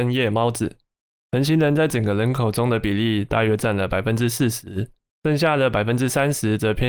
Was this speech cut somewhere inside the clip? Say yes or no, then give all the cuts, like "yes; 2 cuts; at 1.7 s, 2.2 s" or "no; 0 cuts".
yes; 2 cuts; at 1.1 s, 5.1 s